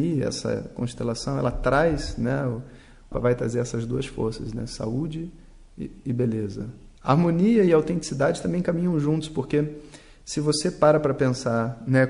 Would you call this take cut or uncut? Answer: cut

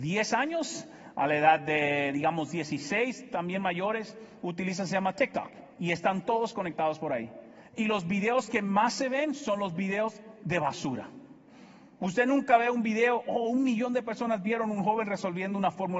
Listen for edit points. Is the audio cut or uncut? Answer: uncut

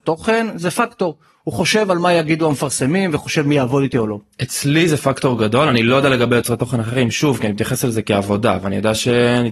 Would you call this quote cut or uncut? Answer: uncut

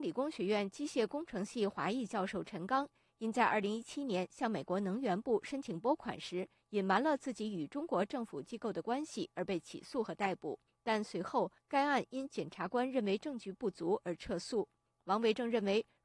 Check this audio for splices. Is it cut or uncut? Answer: uncut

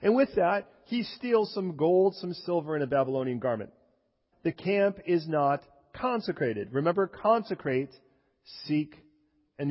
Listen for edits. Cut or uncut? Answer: cut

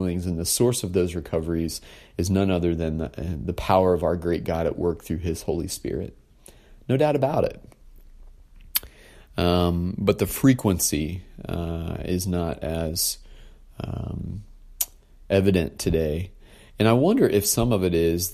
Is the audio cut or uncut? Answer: uncut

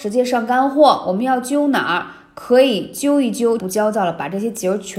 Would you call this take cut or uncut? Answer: cut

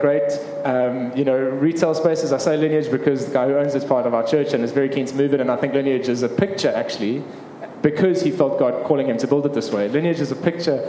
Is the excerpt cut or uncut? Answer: uncut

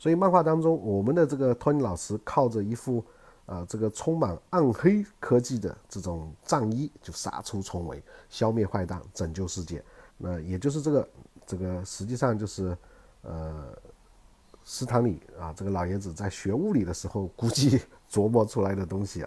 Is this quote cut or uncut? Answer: cut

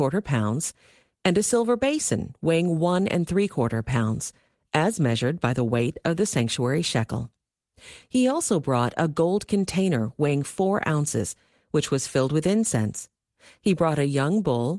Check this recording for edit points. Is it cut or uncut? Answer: cut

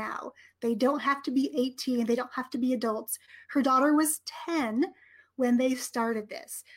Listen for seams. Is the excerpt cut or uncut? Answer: uncut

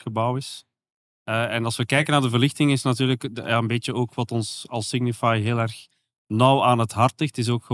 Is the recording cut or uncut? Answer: uncut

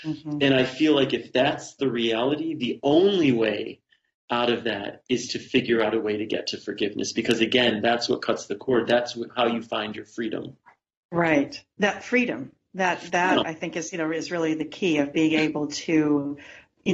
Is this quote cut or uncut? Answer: uncut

